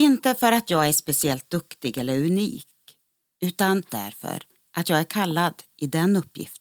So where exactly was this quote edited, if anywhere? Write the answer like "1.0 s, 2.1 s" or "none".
3.9 s